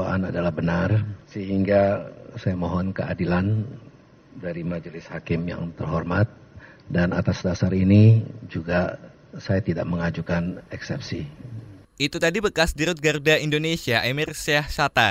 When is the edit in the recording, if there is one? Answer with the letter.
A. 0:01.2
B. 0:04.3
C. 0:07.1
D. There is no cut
A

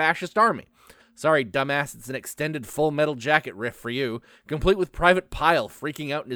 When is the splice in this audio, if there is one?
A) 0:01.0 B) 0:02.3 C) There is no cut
A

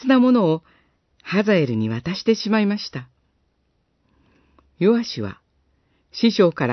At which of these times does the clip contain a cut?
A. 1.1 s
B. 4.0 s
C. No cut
C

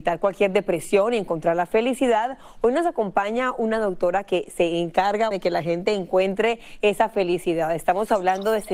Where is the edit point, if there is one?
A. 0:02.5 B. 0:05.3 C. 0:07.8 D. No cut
B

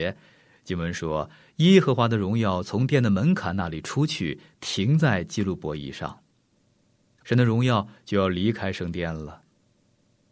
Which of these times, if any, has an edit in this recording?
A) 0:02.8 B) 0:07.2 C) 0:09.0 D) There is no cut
B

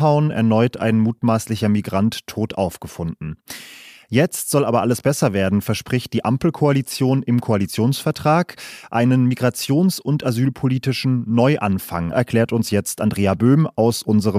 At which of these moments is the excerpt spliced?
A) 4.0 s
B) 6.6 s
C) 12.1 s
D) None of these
C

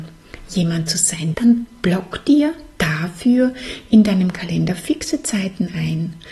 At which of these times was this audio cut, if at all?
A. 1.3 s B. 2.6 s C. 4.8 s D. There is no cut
A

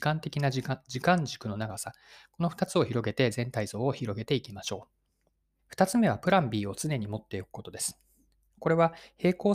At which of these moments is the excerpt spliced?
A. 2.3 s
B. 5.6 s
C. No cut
B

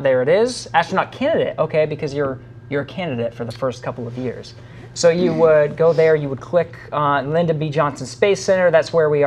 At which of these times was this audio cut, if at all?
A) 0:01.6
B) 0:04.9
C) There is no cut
B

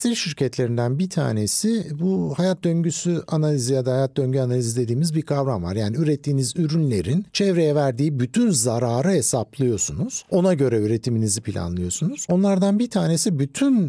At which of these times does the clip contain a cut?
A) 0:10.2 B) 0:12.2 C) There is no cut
C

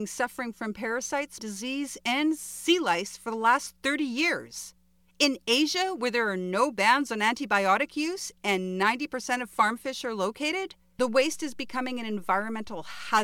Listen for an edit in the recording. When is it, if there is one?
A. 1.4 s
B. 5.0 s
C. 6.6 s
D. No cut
A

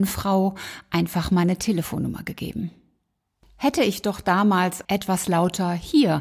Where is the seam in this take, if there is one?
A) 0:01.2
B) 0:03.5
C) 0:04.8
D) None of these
C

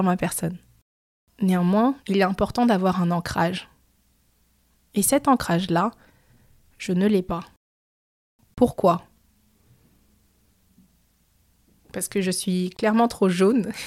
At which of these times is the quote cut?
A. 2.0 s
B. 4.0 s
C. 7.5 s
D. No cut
A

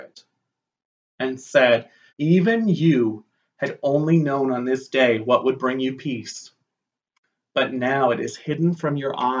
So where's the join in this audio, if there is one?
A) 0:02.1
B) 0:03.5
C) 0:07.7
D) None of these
A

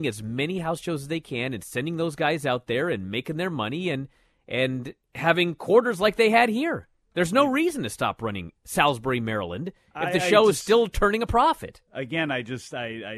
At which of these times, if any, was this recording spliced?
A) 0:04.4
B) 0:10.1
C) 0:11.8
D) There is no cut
D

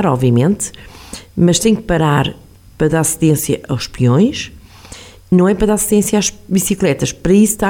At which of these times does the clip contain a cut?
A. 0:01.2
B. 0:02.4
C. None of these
C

